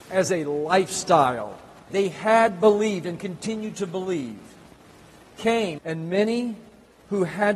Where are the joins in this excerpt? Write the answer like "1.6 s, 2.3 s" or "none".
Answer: 1.9 s, 5.8 s